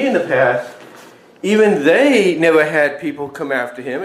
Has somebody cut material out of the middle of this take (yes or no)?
no